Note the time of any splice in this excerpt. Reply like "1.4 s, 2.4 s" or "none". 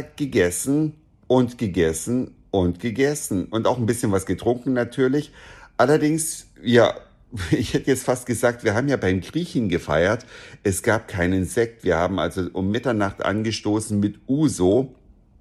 none

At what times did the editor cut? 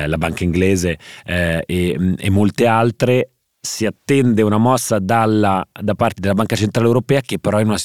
none

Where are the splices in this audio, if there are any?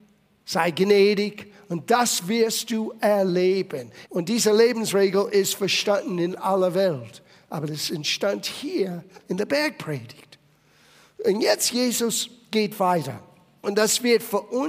4.1 s

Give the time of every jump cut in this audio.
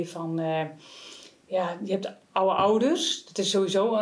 none

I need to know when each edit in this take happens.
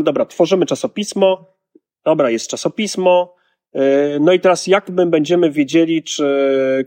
none

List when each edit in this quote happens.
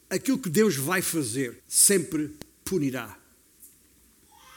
1.6 s

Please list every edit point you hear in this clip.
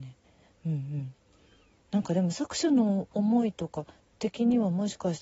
3.1 s

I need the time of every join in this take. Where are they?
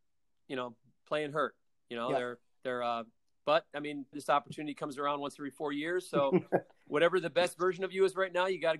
4.1 s

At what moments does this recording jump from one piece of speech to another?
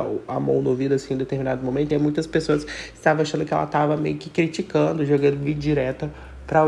none

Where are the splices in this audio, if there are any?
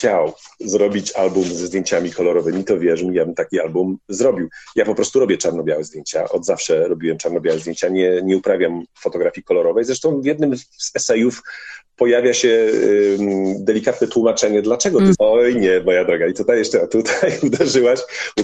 15.1 s

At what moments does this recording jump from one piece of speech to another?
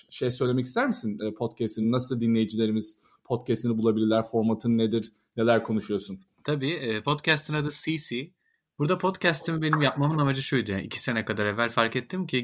none

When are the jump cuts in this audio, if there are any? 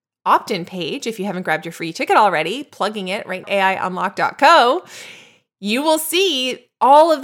3.4 s

